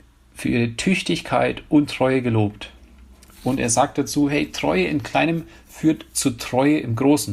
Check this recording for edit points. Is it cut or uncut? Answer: uncut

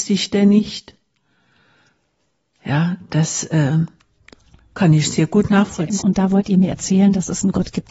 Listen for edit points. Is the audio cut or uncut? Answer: cut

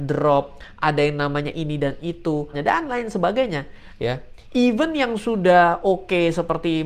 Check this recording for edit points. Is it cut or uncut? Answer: cut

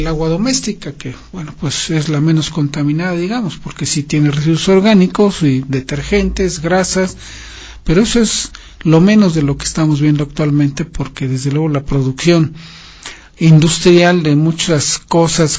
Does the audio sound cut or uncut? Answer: cut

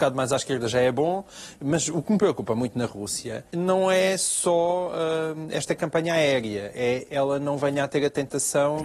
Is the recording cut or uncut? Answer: cut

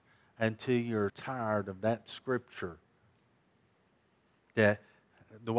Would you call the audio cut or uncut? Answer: cut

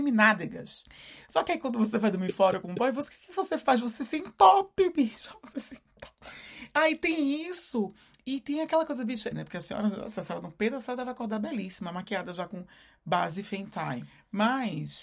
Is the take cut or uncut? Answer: cut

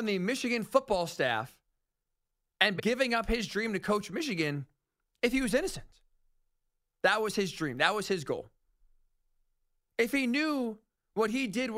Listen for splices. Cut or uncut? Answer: cut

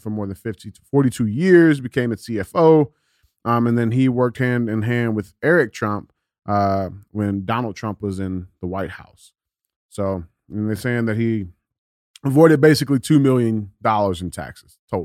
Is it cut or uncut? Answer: uncut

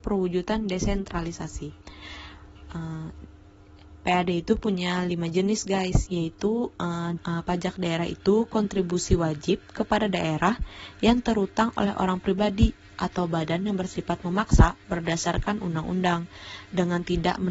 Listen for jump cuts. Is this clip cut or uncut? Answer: cut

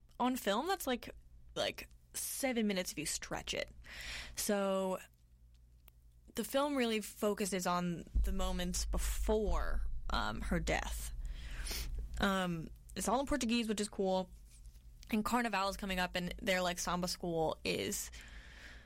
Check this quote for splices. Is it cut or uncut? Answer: cut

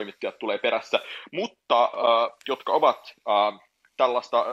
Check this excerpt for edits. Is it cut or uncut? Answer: cut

